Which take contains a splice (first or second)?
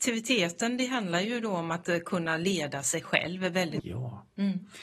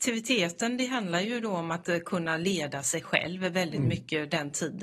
first